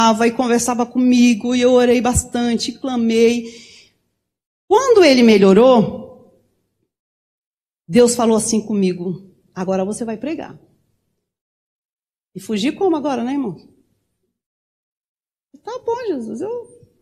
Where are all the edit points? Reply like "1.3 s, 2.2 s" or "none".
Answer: none